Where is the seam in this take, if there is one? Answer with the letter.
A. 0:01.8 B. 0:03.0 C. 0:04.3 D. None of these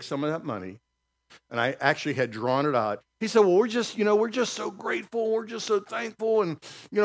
B